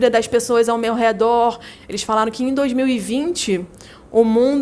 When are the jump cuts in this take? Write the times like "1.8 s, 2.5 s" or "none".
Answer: 1.8 s